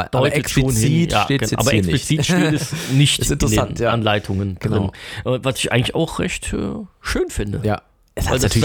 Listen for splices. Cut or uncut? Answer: uncut